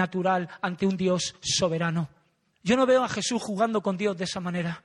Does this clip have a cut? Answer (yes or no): yes